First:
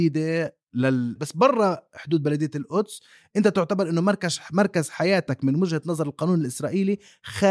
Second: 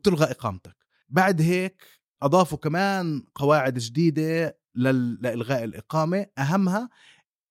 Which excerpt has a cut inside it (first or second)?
first